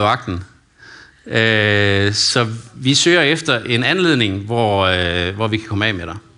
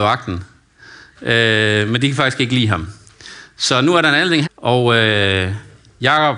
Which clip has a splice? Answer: second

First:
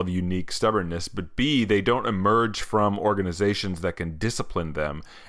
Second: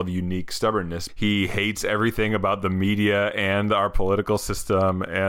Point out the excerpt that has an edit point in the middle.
second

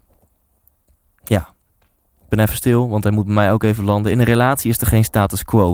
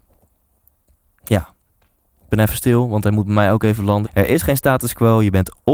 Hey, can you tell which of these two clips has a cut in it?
second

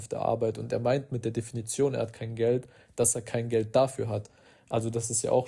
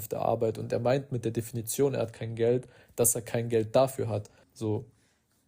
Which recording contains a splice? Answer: second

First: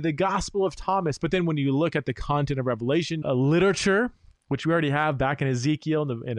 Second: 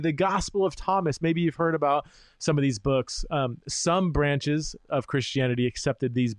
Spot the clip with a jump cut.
first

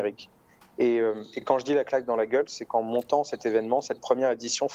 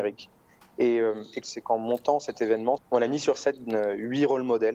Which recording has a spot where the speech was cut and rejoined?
second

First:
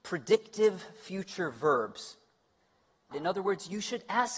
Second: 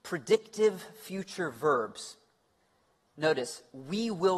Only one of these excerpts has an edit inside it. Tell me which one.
first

